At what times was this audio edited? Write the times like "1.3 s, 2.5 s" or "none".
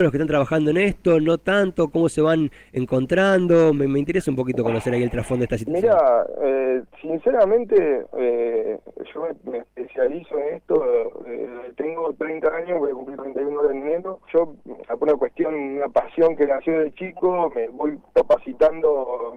14.2 s, 17.5 s